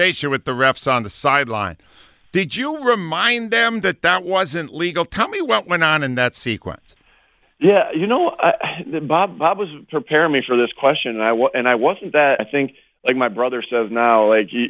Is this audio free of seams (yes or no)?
no